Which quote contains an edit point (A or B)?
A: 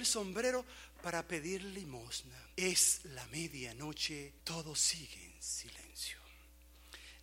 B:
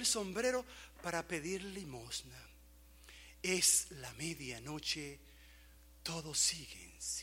A